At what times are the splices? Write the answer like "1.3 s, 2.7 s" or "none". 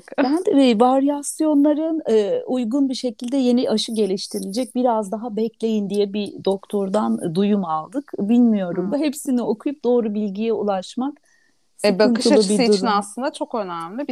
8.9 s